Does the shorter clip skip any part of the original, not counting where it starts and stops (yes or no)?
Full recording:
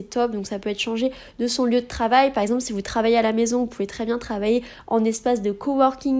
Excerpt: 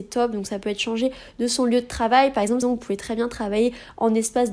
yes